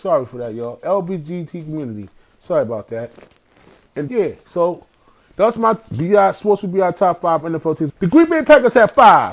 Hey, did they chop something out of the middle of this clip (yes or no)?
yes